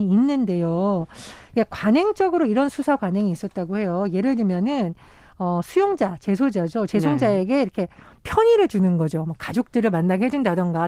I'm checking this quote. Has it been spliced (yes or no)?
no